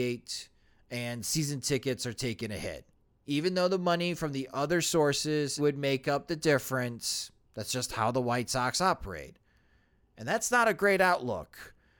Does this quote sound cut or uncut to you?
cut